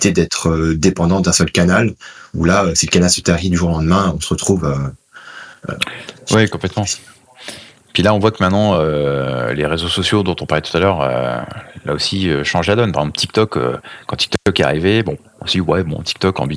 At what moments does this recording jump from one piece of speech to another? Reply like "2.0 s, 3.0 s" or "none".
none